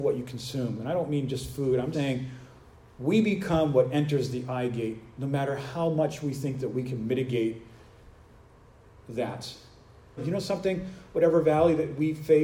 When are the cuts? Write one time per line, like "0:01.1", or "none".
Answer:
0:01.9
0:10.2